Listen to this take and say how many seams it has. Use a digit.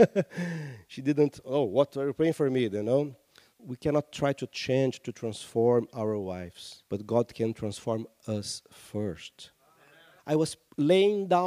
3